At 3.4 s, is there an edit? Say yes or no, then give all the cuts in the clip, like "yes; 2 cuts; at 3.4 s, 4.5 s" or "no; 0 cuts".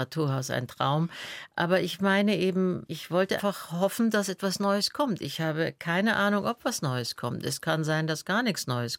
yes; 1 cut; at 3.4 s